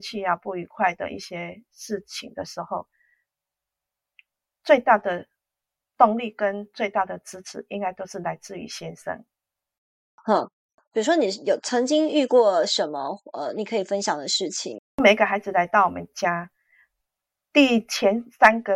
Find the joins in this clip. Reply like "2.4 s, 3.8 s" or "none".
none